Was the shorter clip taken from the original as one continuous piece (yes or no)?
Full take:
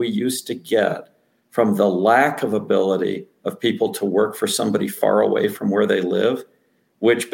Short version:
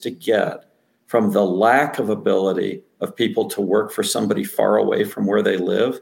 yes